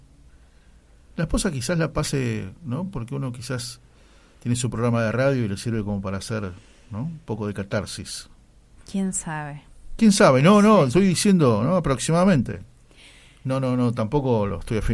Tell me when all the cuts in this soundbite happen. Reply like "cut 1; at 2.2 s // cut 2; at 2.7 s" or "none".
none